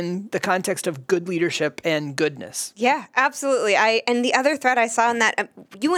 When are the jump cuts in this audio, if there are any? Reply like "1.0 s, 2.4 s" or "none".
none

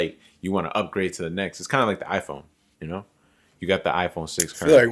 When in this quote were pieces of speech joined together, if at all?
none

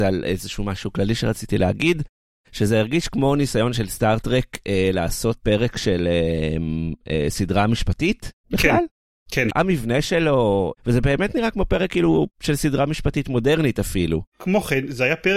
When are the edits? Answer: 9.5 s, 14.3 s

